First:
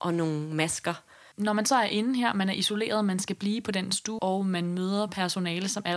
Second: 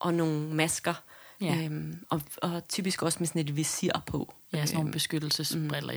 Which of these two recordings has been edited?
first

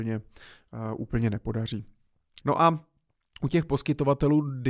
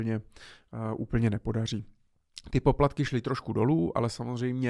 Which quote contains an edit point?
first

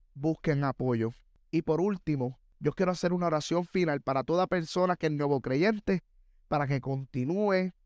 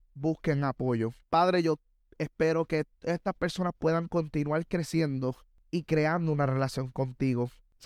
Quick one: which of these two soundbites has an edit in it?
second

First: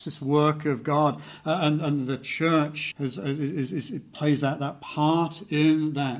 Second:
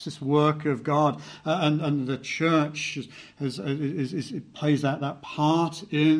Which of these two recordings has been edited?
first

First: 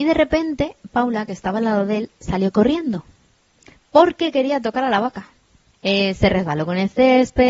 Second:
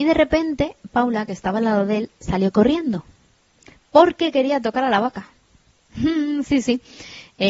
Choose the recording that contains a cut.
first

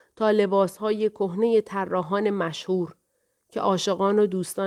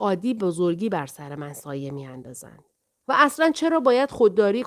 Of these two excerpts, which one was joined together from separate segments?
second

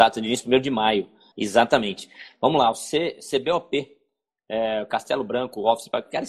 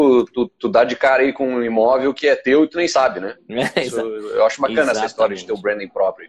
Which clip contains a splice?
first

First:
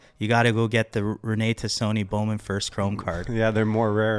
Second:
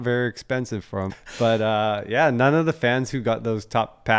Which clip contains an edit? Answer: second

